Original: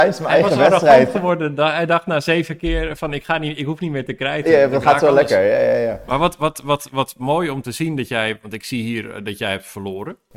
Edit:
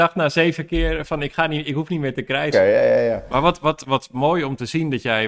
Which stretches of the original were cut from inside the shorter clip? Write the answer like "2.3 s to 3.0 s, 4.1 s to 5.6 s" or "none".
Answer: 4.4 s to 5.3 s, 6.6 s to 6.9 s